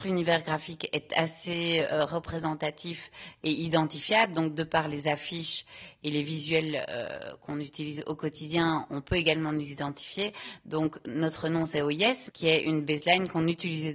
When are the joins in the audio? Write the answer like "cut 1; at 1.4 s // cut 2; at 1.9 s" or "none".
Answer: cut 1; at 10.6 s // cut 2; at 12.3 s